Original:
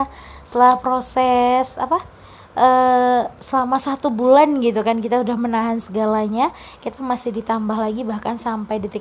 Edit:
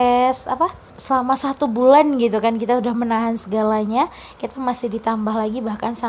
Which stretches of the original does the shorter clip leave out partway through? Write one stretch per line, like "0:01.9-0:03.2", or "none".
0:02.2-0:03.3